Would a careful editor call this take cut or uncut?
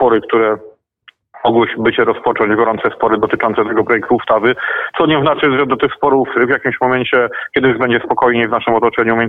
uncut